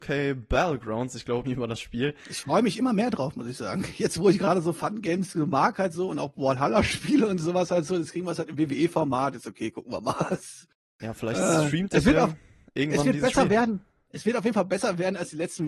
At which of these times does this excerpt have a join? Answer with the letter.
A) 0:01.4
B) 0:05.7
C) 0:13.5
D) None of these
A